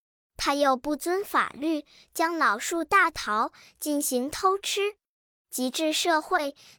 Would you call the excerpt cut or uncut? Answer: uncut